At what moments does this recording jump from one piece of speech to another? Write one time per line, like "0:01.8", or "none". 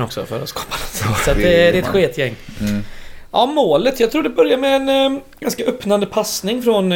none